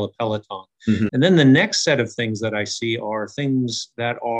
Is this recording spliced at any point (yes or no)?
yes